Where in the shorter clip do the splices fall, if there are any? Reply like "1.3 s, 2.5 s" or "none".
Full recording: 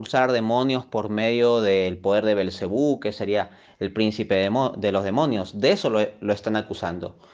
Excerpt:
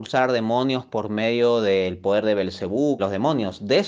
3.0 s